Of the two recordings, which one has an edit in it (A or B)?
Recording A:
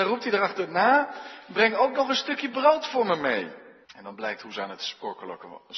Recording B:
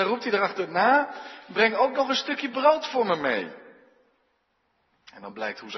A